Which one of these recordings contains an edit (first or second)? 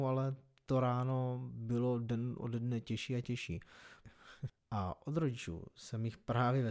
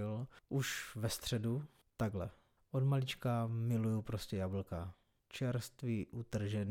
first